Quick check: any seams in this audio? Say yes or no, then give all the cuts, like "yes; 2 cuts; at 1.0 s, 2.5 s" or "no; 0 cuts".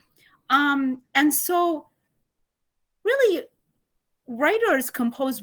no; 0 cuts